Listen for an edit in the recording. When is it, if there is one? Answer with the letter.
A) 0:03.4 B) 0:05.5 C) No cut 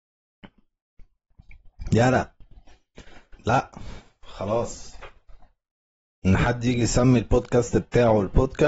A